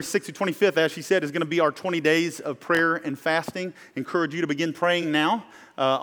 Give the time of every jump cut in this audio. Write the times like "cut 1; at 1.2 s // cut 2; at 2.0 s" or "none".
none